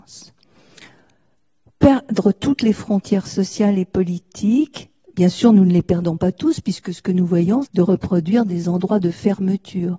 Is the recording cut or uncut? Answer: cut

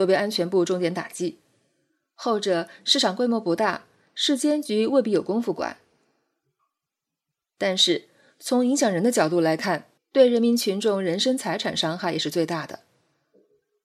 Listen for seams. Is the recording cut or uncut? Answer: cut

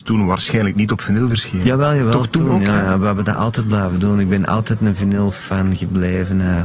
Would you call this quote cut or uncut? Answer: uncut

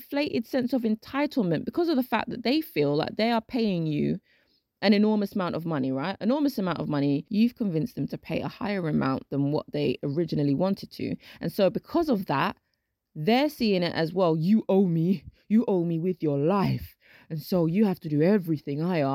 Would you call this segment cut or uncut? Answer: uncut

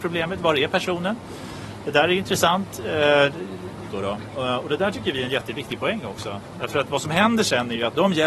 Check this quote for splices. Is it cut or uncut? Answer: cut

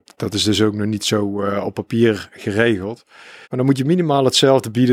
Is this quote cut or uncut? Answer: cut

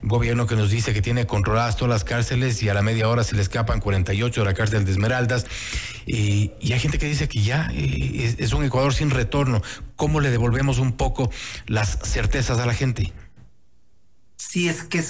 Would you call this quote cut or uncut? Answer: uncut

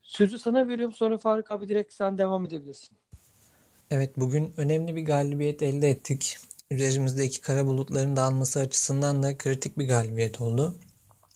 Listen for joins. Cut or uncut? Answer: uncut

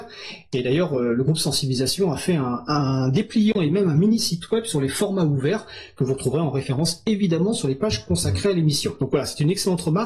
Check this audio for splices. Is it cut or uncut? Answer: uncut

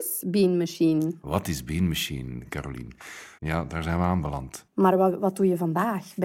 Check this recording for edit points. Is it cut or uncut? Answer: cut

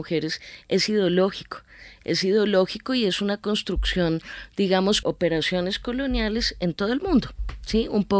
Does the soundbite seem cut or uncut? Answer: cut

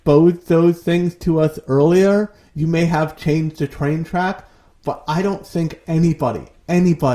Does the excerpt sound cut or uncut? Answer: uncut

